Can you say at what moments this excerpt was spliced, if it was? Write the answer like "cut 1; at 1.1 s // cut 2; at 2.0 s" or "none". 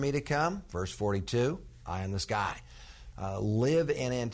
cut 1; at 3.1 s